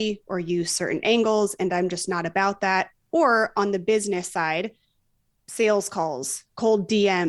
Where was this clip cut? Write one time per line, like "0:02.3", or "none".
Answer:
none